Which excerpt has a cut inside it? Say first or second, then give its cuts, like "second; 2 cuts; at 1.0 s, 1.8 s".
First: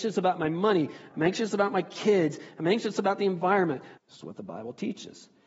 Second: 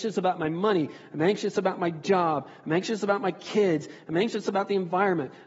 first; 2 cuts; at 1.1 s, 4.0 s